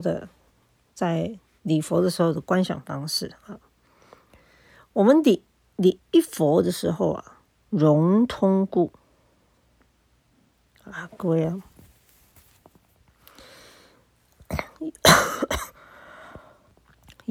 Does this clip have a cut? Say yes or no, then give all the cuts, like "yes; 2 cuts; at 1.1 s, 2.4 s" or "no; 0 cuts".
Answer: yes; 2 cuts; at 6.0 s, 7.7 s